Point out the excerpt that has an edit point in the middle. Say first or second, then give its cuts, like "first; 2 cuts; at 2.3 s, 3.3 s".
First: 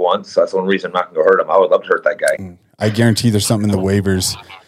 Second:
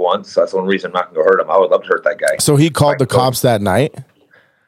first; 1 cut; at 2.4 s